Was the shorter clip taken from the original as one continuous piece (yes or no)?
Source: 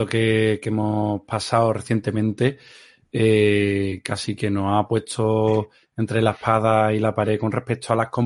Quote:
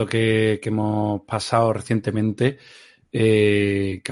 yes